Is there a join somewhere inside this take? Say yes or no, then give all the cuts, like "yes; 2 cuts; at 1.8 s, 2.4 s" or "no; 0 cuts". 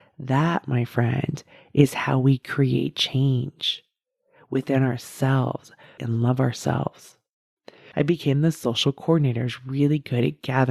yes; 2 cuts; at 6.0 s, 7.9 s